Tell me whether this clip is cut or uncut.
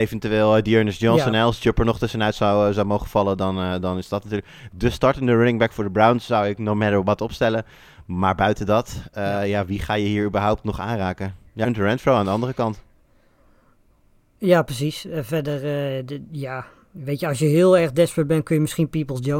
cut